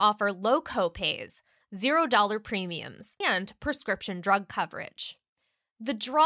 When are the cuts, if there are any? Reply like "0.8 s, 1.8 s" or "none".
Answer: 3.2 s